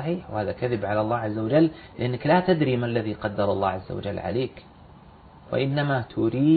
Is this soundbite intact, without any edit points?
yes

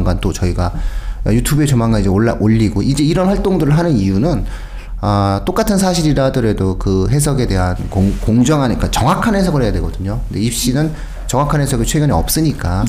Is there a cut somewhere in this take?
no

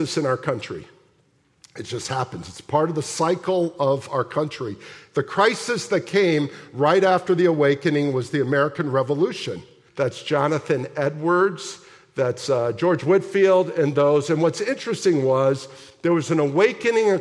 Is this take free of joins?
no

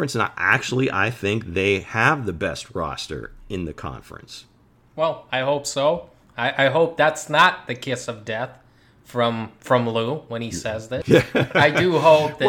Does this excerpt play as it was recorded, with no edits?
no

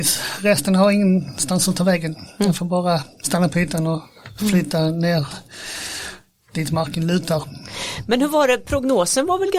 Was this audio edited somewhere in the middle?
no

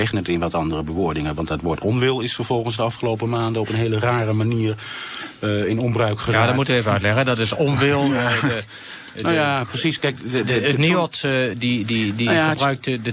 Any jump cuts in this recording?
no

